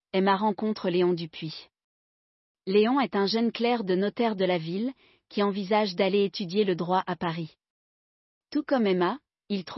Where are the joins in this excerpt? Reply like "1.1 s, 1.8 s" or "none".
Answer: none